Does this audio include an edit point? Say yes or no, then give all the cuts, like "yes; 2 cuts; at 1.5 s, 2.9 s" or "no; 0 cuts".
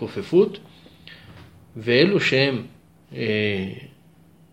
no; 0 cuts